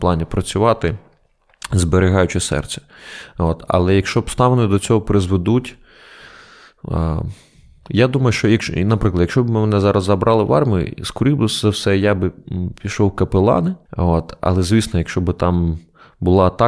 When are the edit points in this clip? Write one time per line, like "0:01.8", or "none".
0:13.9